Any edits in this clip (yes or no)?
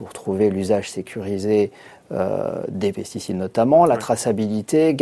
no